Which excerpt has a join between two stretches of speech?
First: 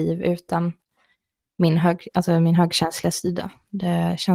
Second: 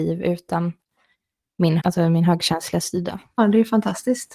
second; 2 cuts; at 1.8 s, 3.4 s

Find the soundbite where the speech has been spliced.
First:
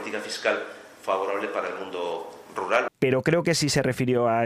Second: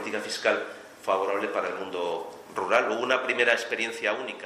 first; 1 cut; at 2.9 s

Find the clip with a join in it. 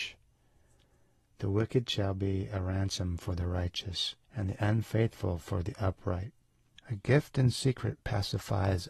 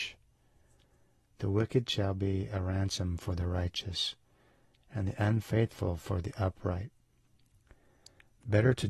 first; 2 cuts; at 4.2 s, 6.8 s

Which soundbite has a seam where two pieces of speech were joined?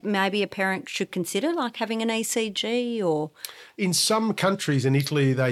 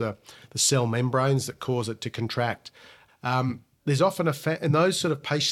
second; 1 cut; at 3.1 s

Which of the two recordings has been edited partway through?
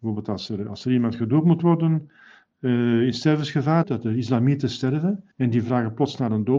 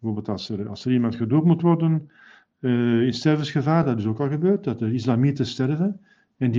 first; 2 cuts; at 3.8 s, 5.3 s

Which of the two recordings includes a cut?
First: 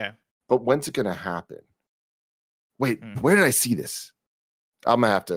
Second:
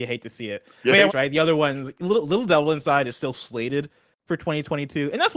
second; 1 cut; at 1.1 s

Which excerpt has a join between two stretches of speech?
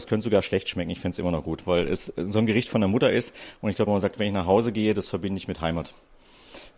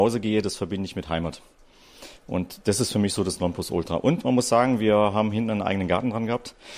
first; 1 cut; at 3.9 s

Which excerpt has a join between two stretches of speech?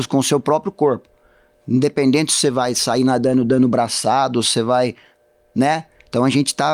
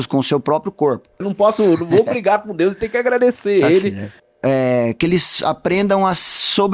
second; 2 cuts; at 1.2 s, 4.2 s

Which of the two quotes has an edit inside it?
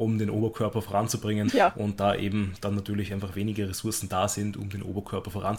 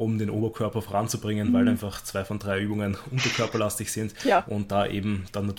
first; 1 cut; at 1.5 s

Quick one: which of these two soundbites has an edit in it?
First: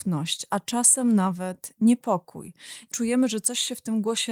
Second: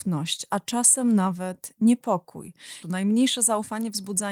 second; 1 cut; at 2.8 s

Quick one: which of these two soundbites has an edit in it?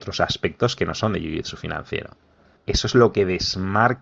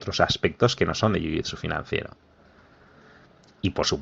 first; 1 cut; at 2.6 s

